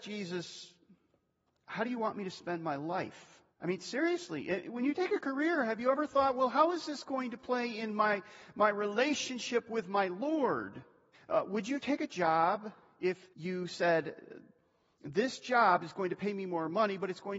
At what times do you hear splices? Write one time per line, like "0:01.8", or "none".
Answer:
0:03.5
0:11.1
0:13.3

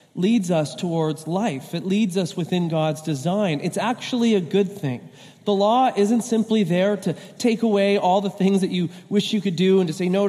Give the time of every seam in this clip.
none

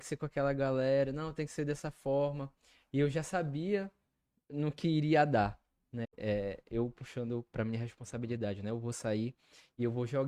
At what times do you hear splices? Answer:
0:06.0

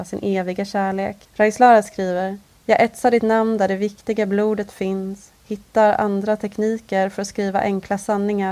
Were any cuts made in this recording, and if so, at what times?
0:01.2
0:02.6

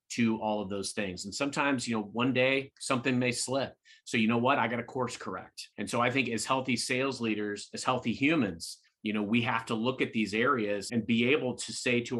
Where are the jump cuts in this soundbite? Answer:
0:08.9
0:10.9

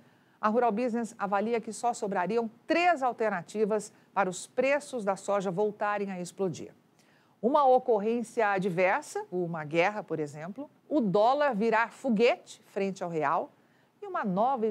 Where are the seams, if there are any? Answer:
0:09.3
0:10.8

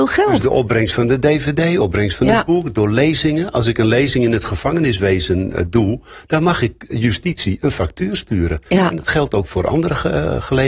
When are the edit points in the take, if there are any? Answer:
none

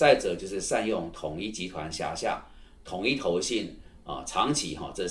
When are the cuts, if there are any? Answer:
none

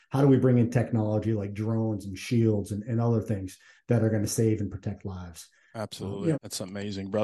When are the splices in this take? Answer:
0:06.3

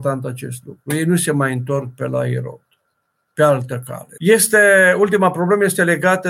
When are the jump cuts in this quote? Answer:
0:04.2

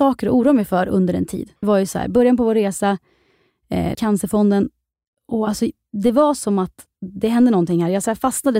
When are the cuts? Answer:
0:01.6
0:03.9

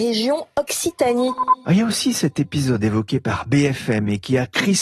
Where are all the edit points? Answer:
none

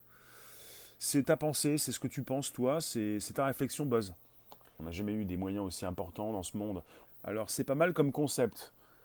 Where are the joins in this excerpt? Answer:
0:04.8
0:07.0

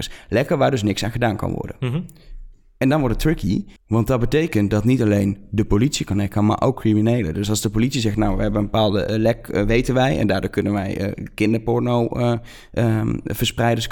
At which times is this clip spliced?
0:03.8

